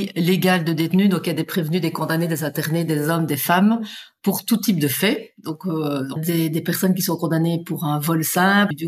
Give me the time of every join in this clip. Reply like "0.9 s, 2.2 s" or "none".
6.1 s

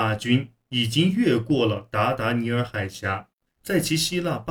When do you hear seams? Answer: 3.4 s

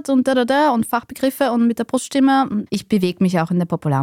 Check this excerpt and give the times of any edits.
2.7 s

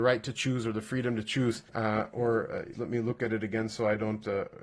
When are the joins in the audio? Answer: 1.7 s, 2.7 s

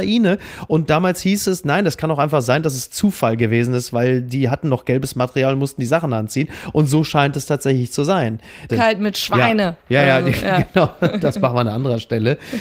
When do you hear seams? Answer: 8.7 s

